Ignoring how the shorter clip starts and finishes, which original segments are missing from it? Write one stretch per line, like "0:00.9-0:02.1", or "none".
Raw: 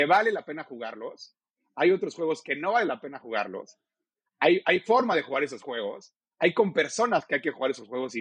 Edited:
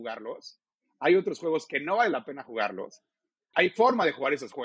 0:04.3-0:04.6